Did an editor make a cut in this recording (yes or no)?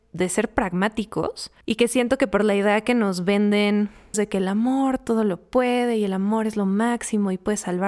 yes